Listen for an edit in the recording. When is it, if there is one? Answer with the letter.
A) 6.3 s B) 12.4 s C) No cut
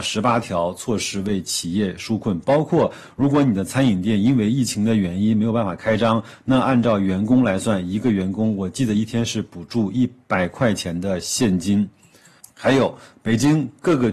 B